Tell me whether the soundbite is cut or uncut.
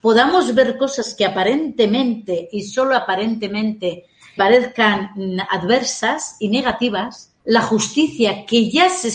cut